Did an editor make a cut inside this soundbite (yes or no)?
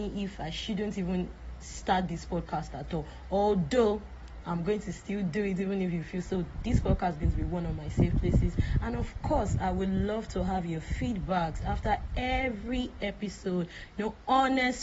yes